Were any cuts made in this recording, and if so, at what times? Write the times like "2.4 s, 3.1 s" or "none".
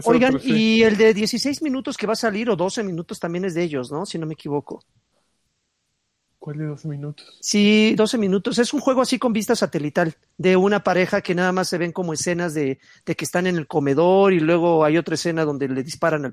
8.0 s